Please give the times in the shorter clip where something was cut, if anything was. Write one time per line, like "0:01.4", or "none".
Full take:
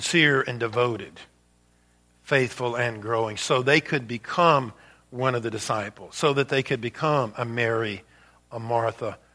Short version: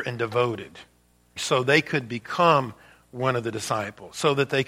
0:01.4